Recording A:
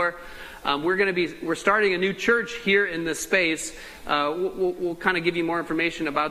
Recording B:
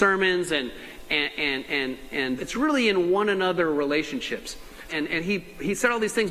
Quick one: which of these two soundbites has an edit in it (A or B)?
B